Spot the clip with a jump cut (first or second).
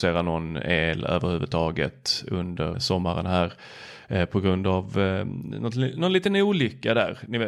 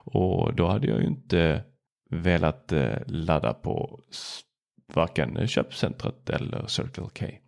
first